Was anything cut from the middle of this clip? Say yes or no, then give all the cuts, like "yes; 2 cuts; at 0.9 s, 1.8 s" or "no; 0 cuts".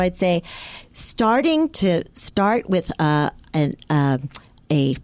no; 0 cuts